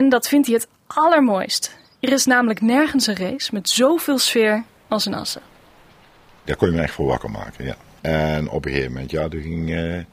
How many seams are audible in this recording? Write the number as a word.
one